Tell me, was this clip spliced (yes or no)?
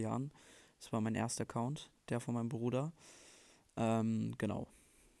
no